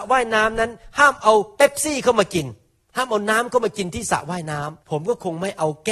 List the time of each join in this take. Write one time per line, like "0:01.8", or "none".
0:04.8